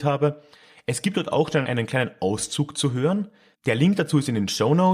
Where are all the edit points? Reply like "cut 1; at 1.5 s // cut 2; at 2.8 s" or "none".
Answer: cut 1; at 1.6 s // cut 2; at 3.5 s